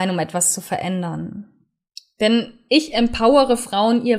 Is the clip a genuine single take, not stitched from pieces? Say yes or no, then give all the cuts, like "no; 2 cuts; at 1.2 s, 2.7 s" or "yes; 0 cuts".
yes; 0 cuts